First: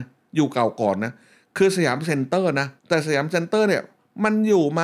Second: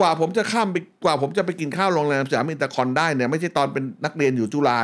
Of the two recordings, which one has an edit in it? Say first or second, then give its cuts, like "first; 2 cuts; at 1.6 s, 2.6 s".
first; 1 cut; at 2.8 s